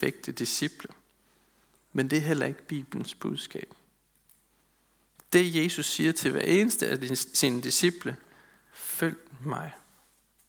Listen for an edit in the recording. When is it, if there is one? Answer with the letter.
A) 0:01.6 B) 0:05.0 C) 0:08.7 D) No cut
C